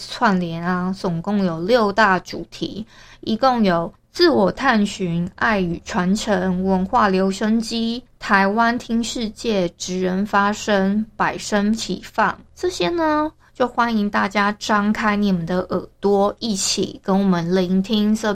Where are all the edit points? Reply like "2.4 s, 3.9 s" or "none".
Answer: none